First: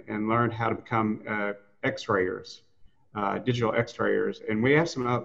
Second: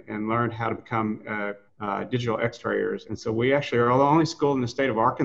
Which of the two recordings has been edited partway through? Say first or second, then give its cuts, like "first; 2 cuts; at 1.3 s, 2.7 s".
second; 2 cuts; at 1.7 s, 3.1 s